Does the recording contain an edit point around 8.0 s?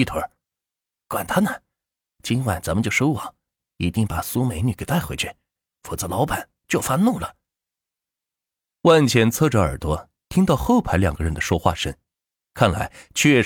no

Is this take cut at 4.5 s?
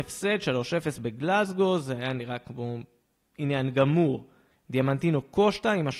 yes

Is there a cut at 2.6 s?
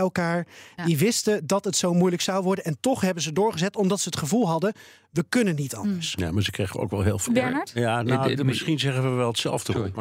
no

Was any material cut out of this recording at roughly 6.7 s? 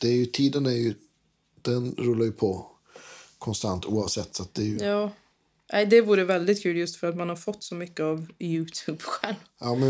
no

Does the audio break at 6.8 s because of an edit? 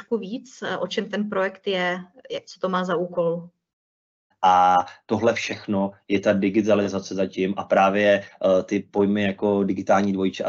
no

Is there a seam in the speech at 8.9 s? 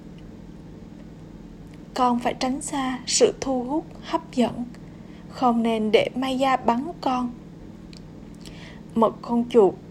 yes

